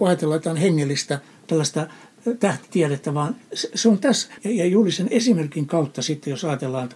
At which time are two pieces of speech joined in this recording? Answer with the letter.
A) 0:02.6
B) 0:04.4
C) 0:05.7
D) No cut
B